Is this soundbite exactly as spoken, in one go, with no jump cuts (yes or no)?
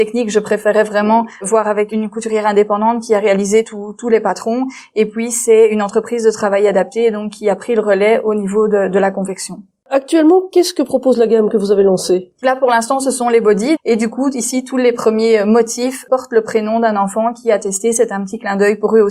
no